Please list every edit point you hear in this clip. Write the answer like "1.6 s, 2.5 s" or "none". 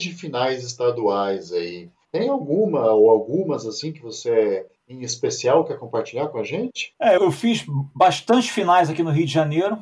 7.2 s